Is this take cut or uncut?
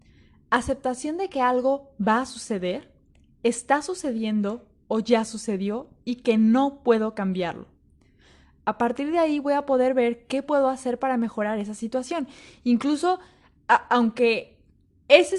uncut